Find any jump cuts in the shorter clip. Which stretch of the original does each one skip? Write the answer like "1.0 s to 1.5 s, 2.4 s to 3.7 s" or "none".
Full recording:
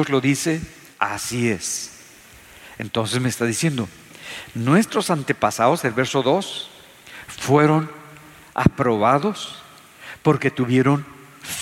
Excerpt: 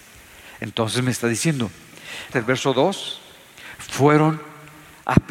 4.5 s to 5.8 s